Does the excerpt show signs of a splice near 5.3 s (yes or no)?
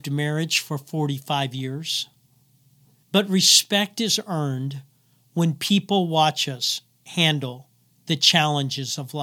no